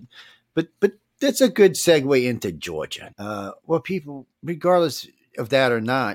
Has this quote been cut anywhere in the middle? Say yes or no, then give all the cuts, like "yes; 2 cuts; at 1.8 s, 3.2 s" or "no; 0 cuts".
yes; 2 cuts; at 3.1 s, 4.3 s